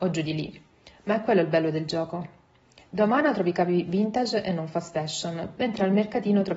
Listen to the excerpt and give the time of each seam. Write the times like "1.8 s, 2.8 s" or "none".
5.5 s